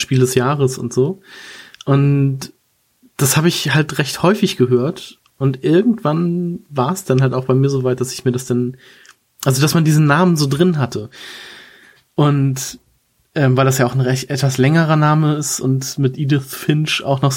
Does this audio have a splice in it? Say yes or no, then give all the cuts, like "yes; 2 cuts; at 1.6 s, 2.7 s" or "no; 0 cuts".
no; 0 cuts